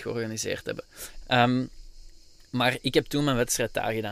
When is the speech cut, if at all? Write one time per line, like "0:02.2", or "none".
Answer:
0:01.2